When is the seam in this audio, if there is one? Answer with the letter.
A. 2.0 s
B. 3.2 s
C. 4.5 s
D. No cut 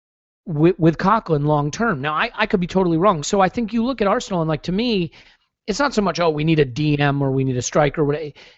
B